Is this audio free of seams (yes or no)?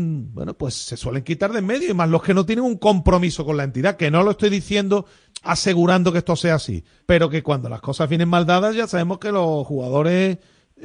no